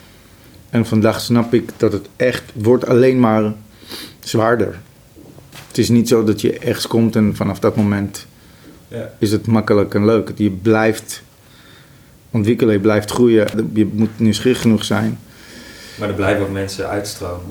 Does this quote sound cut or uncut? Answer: cut